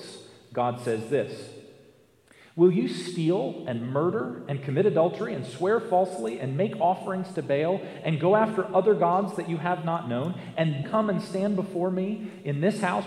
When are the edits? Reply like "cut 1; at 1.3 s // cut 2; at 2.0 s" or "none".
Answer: cut 1; at 10.8 s

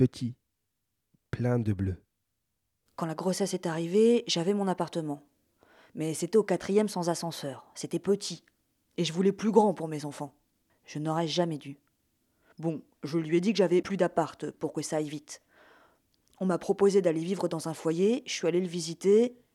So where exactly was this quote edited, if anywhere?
cut 1; at 10.7 s

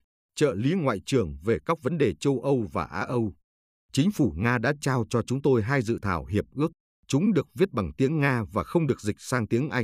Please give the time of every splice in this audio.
cut 1; at 6.9 s

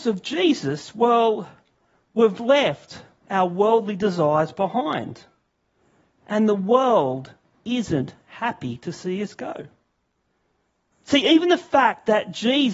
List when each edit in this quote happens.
cut 1; at 10.9 s

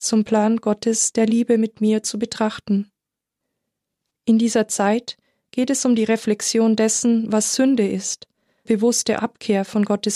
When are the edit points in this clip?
cut 1; at 4.1 s // cut 2; at 8.7 s

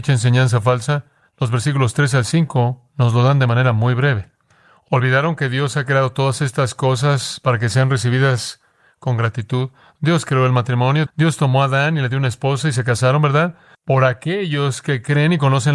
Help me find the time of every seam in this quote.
cut 1; at 11.1 s // cut 2; at 13.7 s

